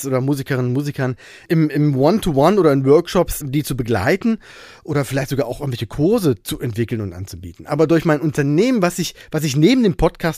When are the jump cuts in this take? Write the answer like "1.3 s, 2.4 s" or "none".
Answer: 3.4 s